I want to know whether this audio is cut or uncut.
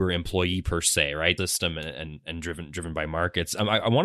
cut